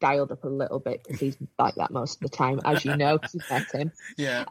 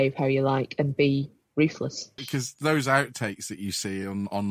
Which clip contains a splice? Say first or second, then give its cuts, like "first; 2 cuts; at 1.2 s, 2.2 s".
second; 1 cut; at 2.2 s